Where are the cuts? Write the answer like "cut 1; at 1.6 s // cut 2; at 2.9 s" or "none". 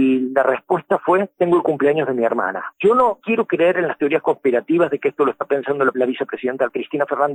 cut 1; at 2.7 s